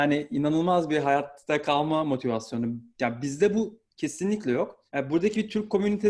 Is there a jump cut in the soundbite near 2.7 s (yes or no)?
no